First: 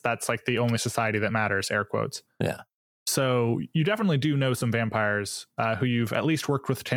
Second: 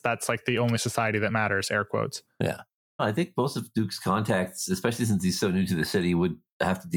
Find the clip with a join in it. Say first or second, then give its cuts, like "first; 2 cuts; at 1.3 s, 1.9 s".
second; 1 cut; at 3.0 s